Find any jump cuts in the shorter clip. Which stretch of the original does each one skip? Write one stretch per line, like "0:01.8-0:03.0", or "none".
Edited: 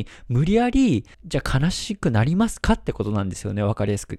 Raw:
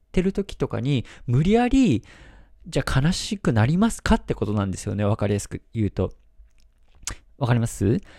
0:02.1-0:02.6